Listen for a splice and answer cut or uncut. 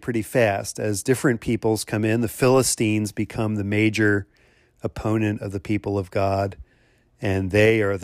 uncut